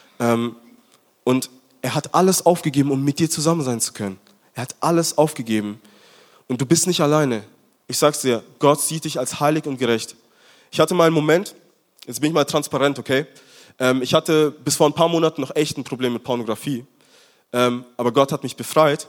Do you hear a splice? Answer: yes; 1 cut; at 7.8 s

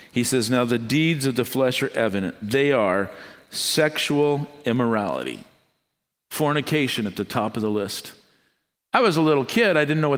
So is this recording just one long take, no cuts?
no; 1 cut; at 8.8 s

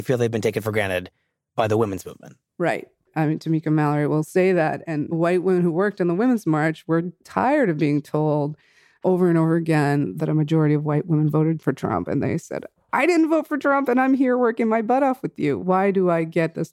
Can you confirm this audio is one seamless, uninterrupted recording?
yes; 0 cuts

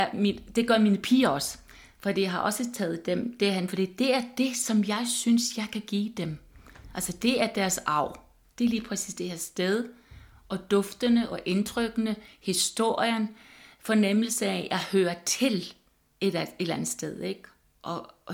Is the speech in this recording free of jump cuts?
yes; 0 cuts

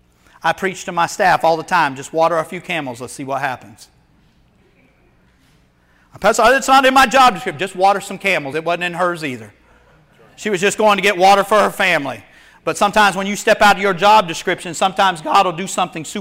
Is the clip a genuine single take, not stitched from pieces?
yes; 0 cuts

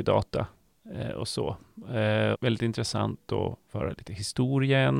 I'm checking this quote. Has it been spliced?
yes; 1 cut; at 2.3 s

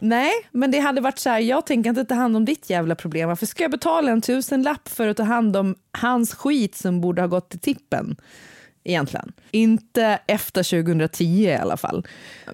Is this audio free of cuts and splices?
no; 1 cut; at 9.5 s

